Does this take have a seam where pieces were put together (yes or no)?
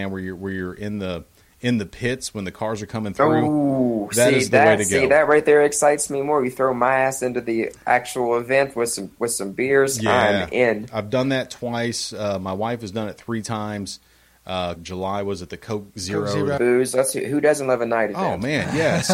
yes